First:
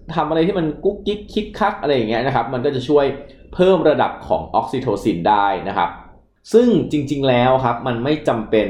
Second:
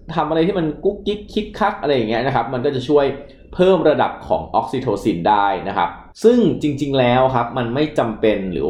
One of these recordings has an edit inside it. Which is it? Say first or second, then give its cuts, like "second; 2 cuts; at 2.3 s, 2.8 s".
second; 1 cut; at 6.1 s